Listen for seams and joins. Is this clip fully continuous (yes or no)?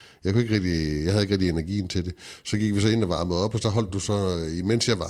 yes